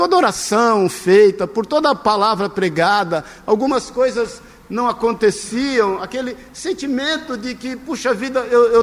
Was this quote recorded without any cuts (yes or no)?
yes